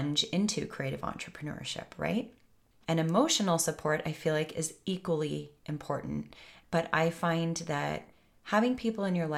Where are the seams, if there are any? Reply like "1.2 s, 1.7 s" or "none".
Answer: 2.8 s, 6.6 s